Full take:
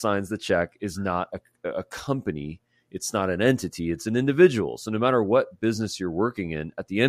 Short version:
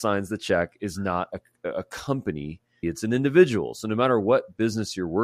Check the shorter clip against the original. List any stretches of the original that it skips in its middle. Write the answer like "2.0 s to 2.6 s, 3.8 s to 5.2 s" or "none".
2.8 s to 3.9 s